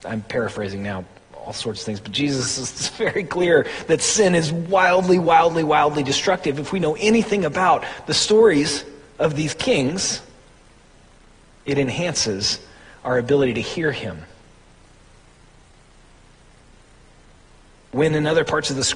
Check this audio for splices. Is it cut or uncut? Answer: uncut